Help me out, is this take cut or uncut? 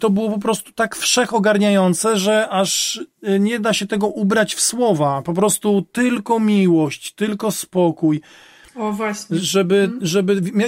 cut